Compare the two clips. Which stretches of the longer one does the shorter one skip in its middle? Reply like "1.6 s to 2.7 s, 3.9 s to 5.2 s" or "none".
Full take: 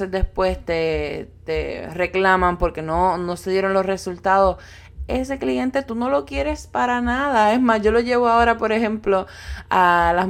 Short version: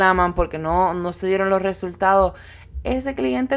none